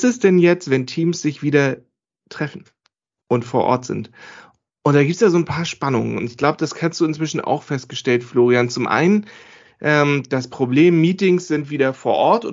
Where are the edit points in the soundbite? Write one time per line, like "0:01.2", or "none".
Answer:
none